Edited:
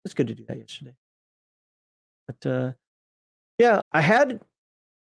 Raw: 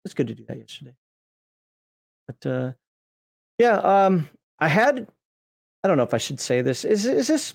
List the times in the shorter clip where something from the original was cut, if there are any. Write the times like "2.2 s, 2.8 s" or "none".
3.8 s